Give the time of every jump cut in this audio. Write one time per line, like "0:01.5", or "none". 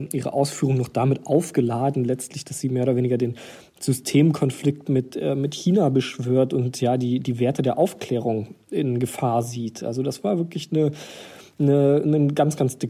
none